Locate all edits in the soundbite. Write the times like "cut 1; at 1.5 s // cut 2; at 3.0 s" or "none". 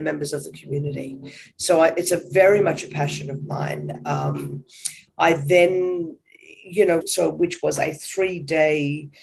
cut 1; at 7.0 s